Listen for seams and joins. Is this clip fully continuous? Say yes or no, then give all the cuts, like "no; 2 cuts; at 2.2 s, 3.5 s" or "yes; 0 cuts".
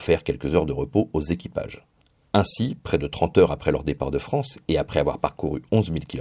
yes; 0 cuts